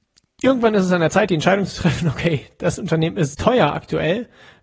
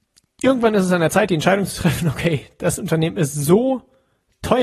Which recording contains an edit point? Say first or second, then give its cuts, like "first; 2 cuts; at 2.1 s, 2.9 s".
first; 1 cut; at 3.3 s